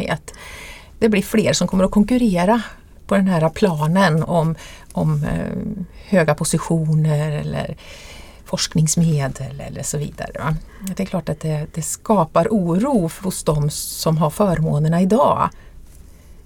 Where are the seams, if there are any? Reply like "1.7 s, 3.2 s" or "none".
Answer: none